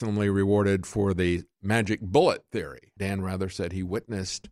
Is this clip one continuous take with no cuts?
no; 1 cut; at 3.0 s

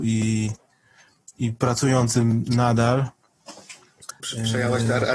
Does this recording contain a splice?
yes; 1 cut; at 4.2 s

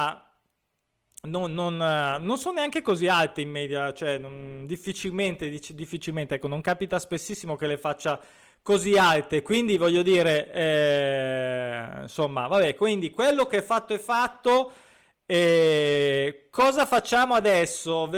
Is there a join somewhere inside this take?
no; 0 cuts

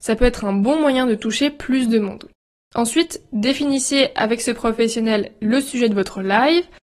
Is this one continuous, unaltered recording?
yes; 0 cuts

